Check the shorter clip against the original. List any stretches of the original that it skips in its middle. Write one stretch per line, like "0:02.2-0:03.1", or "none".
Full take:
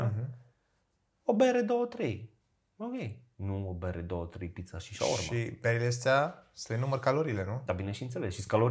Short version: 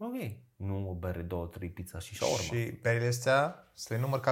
none